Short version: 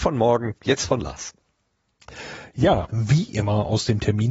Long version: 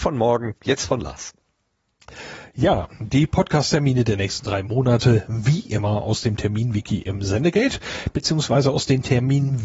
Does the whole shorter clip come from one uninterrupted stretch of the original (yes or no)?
no